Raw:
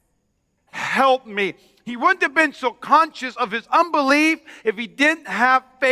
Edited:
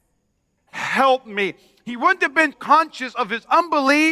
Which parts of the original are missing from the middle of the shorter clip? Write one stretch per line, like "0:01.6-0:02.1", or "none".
0:02.5-0:02.7